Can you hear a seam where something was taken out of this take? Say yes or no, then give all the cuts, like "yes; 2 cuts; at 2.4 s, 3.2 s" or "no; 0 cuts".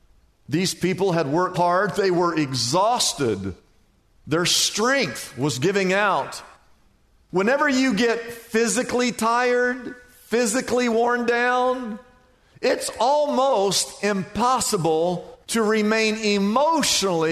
yes; 2 cuts; at 1.5 s, 15.4 s